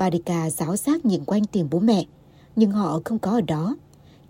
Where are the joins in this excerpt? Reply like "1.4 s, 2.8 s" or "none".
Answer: none